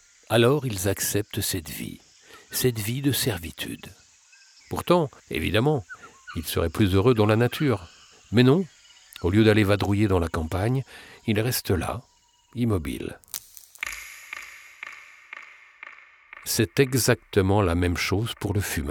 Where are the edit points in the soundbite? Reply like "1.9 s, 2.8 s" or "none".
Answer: 5.2 s

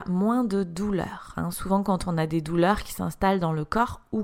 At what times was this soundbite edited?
none

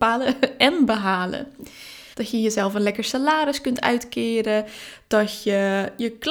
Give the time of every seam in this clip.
2.1 s

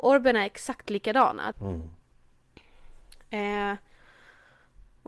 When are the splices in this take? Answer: 1.5 s

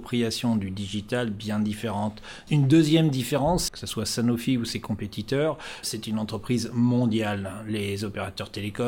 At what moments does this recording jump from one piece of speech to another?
2.5 s, 3.7 s, 5.8 s

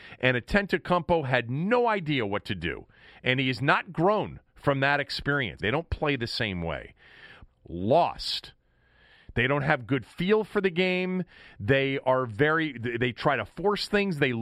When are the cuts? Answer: 5.6 s, 7.5 s

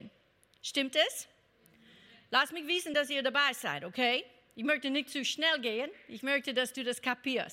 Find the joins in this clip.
none

